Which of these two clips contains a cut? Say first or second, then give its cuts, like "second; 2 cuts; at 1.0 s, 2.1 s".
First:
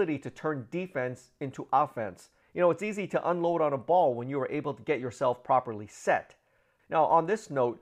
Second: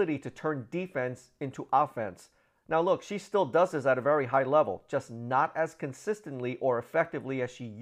first; 2 cuts; at 2.4 s, 6.8 s